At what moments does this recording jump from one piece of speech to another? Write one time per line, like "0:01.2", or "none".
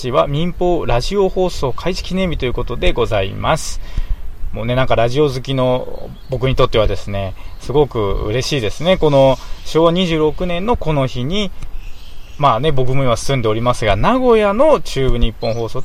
none